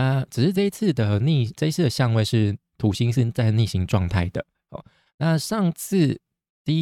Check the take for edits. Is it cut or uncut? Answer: uncut